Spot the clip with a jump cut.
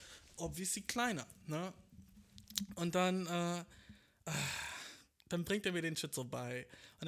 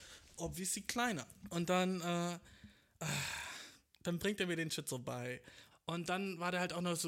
second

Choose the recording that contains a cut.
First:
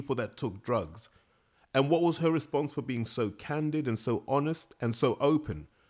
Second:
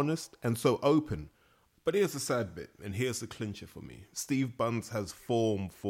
second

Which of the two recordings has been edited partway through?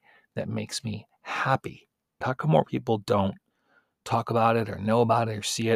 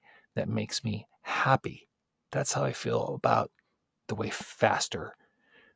first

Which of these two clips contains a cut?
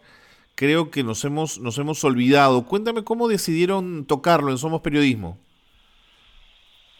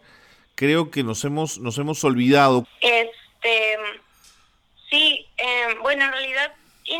second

